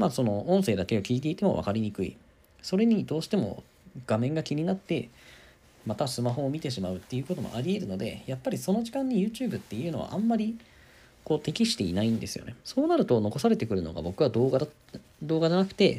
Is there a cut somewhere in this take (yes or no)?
yes